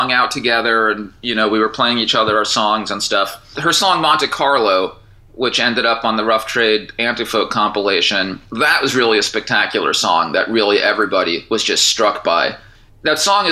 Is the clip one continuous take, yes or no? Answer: yes